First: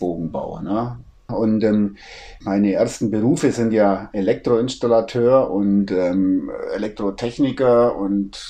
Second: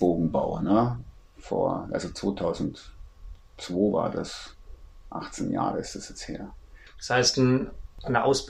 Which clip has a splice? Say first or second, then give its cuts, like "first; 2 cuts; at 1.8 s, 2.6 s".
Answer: first; 2 cuts; at 1.3 s, 2.4 s